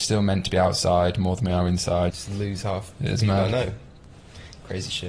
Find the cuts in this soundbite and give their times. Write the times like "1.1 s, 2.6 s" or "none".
2.1 s